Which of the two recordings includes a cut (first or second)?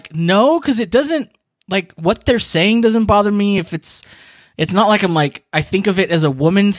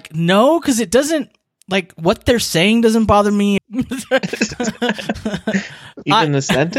second